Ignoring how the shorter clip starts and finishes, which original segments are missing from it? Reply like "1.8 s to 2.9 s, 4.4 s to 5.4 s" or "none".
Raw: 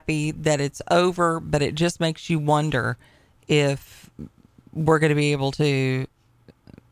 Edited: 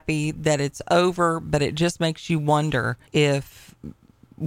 3.1 s to 3.4 s